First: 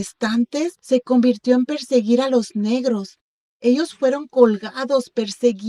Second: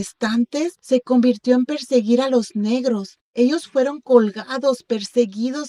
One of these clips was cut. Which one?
second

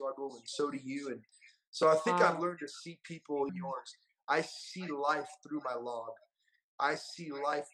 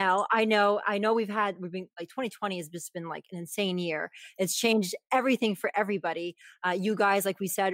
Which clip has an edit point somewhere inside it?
first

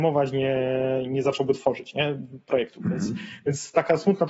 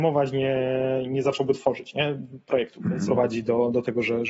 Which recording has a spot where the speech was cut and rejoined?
second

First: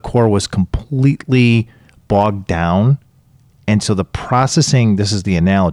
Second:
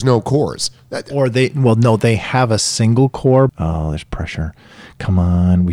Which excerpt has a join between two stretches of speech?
second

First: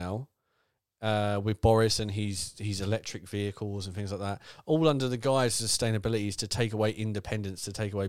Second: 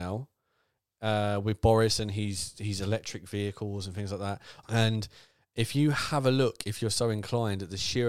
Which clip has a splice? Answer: second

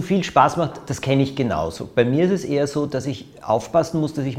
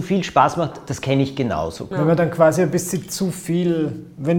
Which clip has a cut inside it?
second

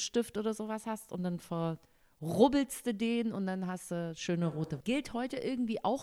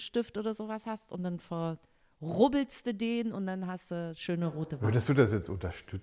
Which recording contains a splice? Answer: first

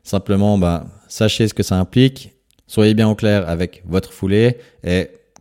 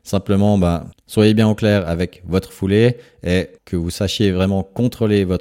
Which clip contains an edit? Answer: second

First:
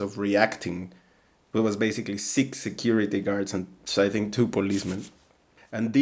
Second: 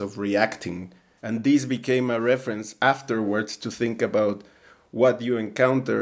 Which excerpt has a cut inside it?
second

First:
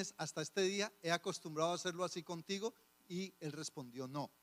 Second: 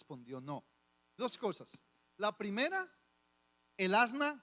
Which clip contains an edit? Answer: second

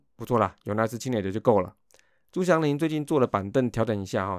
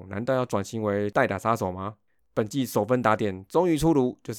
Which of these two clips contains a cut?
second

